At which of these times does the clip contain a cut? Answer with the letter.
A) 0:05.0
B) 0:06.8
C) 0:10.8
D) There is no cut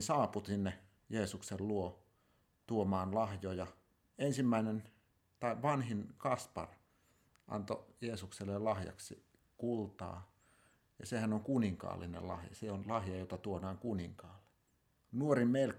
D